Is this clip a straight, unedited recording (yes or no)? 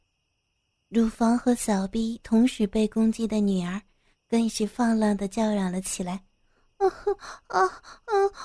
yes